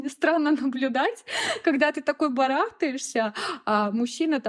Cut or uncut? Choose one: uncut